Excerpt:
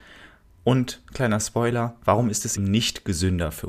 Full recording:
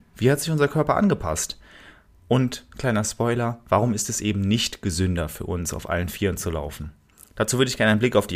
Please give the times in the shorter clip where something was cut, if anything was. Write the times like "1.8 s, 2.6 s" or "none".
2.6 s